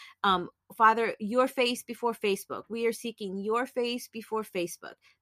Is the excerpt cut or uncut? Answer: uncut